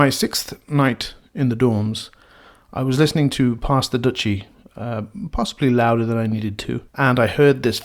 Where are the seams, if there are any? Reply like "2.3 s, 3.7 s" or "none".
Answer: 6.9 s